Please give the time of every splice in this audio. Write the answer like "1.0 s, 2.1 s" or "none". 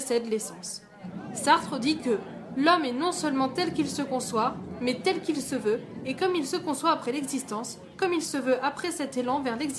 none